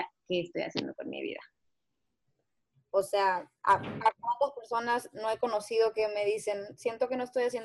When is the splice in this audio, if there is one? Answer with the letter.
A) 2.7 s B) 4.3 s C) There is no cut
A